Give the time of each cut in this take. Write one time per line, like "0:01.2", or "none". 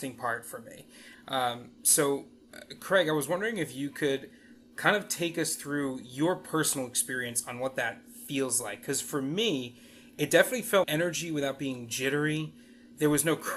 0:01.1
0:10.8